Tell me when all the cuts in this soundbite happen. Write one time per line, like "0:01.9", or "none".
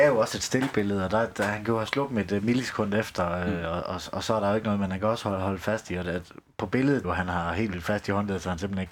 0:07.0